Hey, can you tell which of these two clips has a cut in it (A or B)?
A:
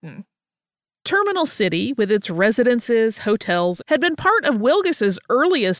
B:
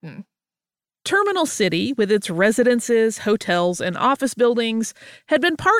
A